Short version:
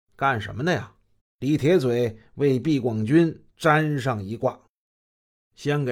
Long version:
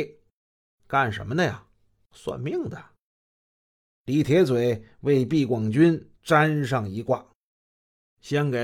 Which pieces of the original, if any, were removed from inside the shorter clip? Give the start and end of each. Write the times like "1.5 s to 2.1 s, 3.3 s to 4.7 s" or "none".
1.9 s to 3.9 s